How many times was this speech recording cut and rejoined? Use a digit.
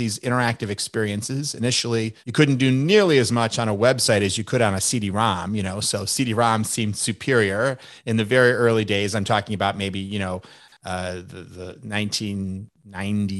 1